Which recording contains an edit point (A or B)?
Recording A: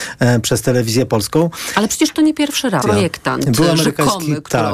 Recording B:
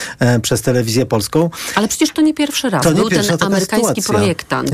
A